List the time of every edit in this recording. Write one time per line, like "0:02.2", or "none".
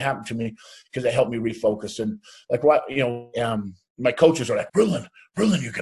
0:03.3
0:04.7